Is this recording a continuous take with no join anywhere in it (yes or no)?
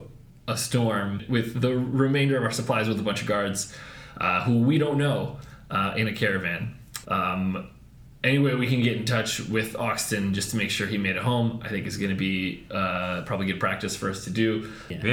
no